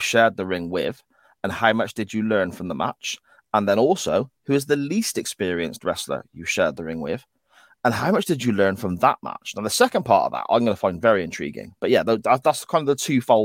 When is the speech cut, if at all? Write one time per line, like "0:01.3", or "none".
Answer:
none